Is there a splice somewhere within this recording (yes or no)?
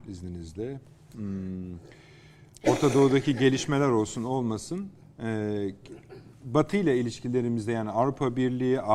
yes